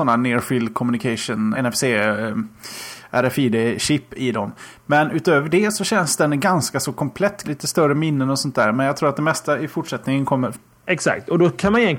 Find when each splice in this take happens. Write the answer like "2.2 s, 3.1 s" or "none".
1.5 s, 7.4 s, 10.5 s

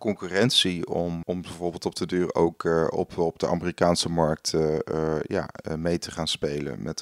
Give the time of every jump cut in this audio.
1.2 s

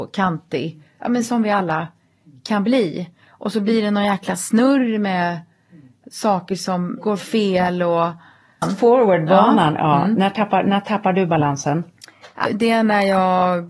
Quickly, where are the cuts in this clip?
8.6 s, 12.4 s

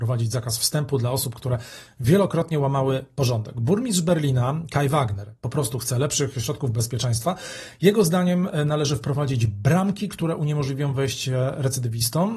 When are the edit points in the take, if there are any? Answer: none

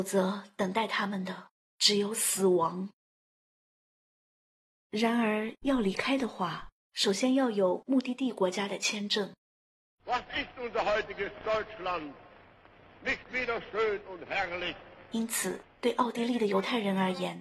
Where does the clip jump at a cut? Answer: 9.9 s

